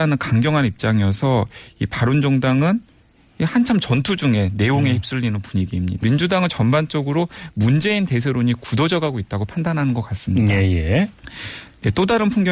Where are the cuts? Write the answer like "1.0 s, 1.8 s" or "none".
6.0 s